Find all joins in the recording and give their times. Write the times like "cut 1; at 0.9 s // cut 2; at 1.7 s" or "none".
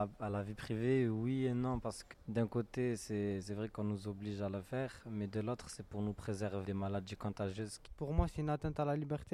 cut 1; at 6.6 s